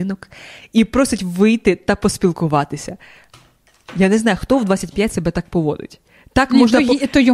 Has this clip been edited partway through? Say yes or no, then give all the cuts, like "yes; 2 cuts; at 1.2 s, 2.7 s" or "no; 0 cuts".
no; 0 cuts